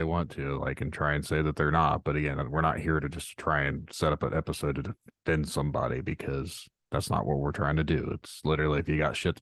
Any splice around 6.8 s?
yes; 1 cut; at 6.8 s

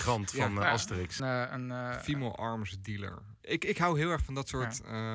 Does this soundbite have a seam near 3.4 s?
yes; 2 cuts; at 1.2 s, 3.4 s

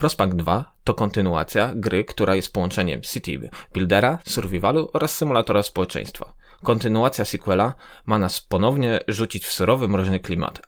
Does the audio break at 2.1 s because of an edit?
no; 2 cuts; at 4.2 s, 6.6 s

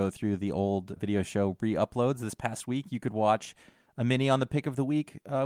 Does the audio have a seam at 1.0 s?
yes; 1 cut; at 1.0 s

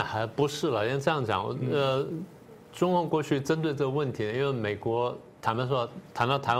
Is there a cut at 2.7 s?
no; 1 cut; at 5.4 s

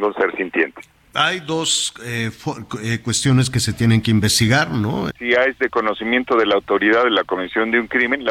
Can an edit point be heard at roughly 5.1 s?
yes; 1 cut; at 5.1 s

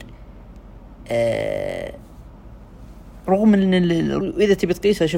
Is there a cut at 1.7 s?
no; 1 cut; at 4.2 s

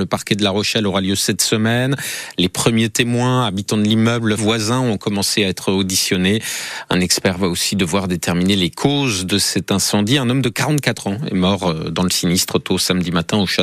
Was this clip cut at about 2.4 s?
no; 1 cut; at 4.4 s

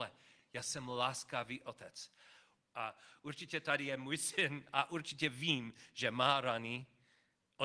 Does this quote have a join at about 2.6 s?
yes; 1 cut; at 2.6 s

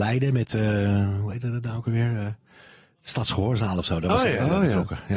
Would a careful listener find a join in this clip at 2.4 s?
no; 0 cuts

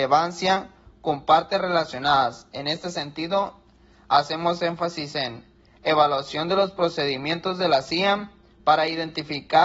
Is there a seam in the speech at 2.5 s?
no; 0 cuts

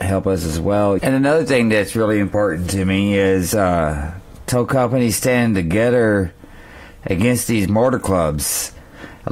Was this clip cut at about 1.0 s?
yes; 1 cut; at 1.0 s

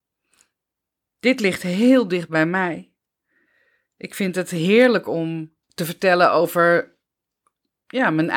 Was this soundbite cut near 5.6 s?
yes; 1 cut; at 5.6 s

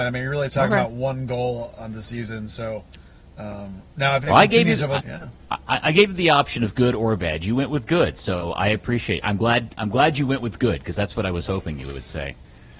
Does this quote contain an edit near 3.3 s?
no; 1 cut; at 5.0 s

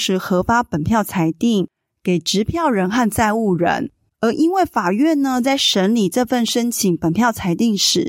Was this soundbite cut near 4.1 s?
yes; 1 cut; at 4.1 s

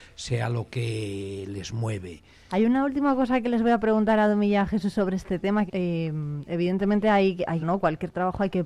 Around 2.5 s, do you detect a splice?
yes; 3 cuts; at 2.5 s, 5.7 s, 7.6 s

